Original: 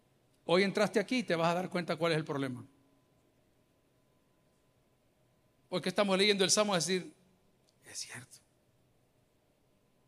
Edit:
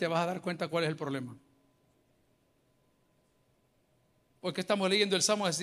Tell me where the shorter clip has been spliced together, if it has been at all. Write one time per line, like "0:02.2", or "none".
none